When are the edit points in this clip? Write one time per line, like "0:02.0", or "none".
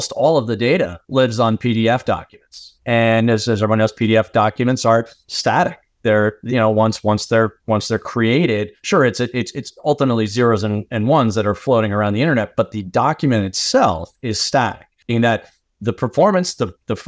none